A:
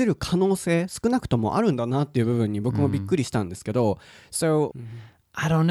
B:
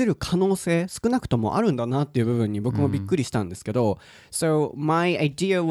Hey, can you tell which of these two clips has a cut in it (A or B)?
A